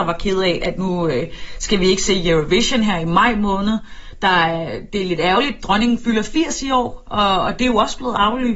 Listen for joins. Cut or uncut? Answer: uncut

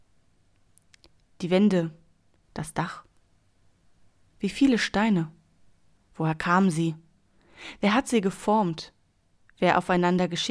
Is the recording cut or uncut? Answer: cut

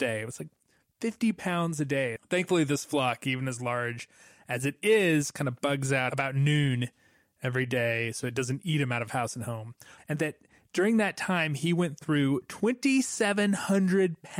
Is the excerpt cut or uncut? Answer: cut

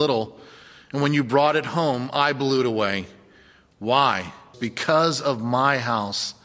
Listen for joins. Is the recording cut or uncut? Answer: cut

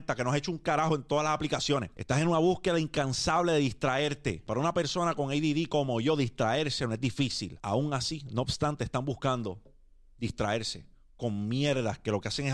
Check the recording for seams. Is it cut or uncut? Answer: cut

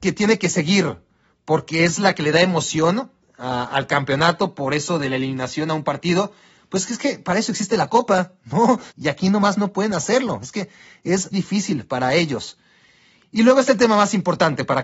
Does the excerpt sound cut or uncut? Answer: cut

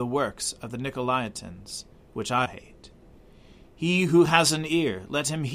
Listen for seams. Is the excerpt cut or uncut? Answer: cut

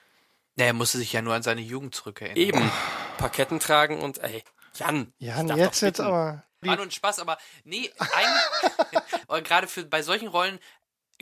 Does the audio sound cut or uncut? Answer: cut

